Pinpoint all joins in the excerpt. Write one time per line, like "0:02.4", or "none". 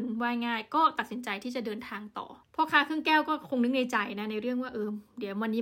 0:02.4